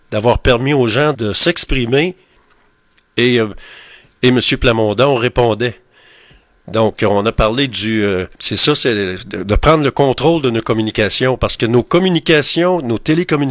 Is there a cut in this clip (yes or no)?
yes